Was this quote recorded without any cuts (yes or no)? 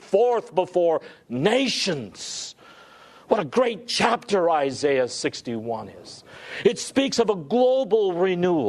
yes